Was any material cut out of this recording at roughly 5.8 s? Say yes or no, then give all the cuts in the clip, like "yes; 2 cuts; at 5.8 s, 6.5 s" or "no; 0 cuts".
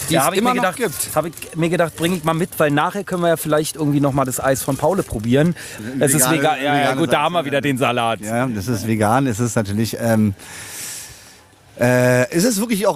yes; 1 cut; at 5.8 s